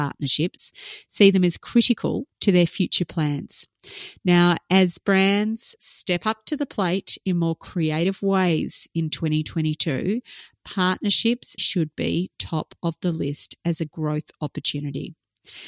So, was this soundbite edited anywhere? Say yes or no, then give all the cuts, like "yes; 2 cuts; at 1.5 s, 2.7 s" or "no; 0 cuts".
yes; 2 cuts; at 2.3 s, 11.6 s